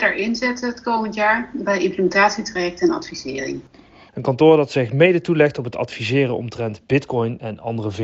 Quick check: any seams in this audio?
yes; 1 cut; at 4.1 s

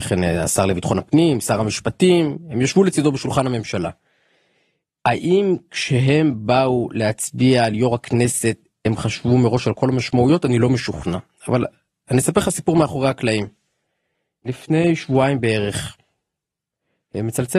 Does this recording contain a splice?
no; 0 cuts

